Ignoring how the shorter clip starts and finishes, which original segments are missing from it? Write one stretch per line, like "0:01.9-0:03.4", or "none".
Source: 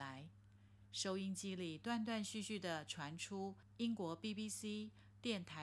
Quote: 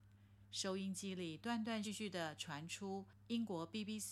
0:02.2-0:02.3